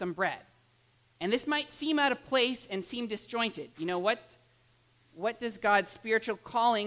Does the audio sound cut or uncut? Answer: uncut